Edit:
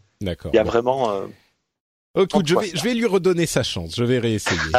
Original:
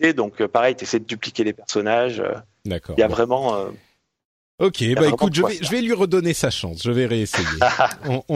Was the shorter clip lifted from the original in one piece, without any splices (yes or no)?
no